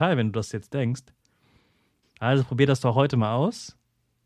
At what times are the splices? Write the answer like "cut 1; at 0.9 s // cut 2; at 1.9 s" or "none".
cut 1; at 2.0 s